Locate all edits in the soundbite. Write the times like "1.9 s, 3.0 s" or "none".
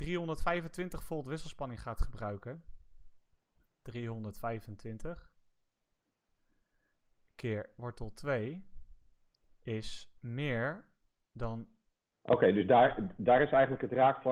10.2 s, 12.1 s